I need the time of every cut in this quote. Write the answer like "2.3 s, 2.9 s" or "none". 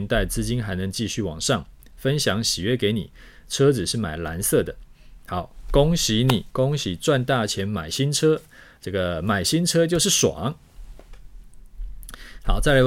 none